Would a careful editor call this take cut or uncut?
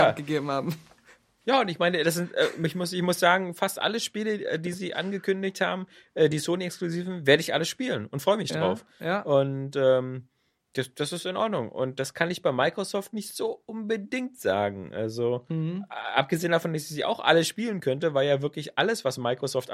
uncut